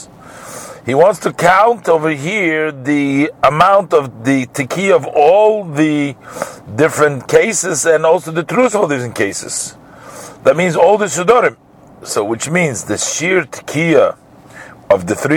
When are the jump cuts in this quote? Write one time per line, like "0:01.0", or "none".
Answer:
none